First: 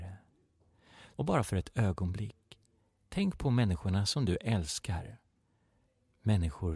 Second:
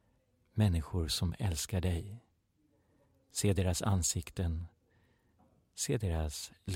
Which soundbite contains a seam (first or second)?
first